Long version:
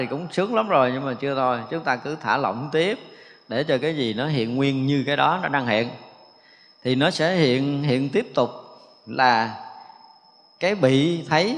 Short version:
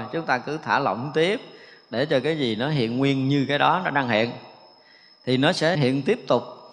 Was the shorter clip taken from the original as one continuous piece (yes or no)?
no